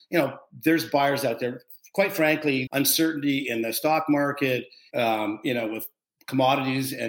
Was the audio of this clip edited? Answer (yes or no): yes